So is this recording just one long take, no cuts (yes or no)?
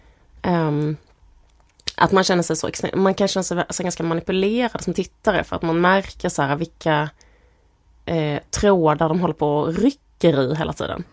yes